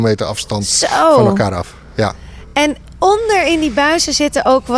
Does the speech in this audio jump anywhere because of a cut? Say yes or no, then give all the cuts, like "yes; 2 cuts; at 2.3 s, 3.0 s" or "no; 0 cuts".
no; 0 cuts